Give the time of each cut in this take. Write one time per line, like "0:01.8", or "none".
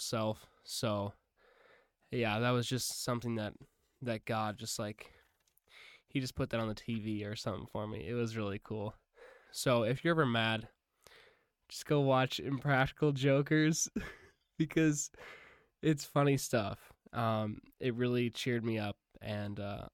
0:09.5